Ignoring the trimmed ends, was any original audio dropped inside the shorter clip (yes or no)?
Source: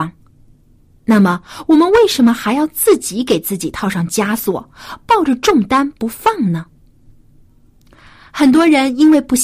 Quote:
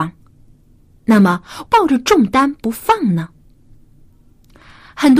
yes